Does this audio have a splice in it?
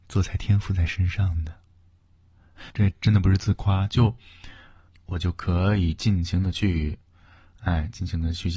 yes; 2 cuts; at 2.7 s, 4.9 s

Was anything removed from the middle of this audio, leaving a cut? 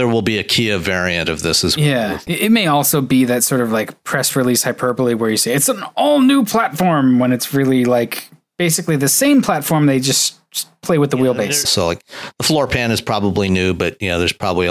yes; 2 cuts; at 2.3 s, 11.6 s

